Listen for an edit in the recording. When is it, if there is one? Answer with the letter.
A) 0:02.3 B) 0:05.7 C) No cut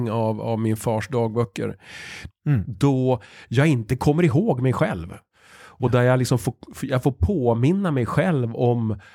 A